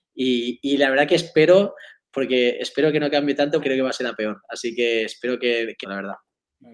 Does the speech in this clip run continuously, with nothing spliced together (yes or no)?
no